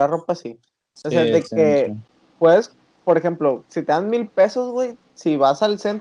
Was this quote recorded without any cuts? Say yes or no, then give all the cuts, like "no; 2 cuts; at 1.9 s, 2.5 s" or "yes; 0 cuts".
yes; 0 cuts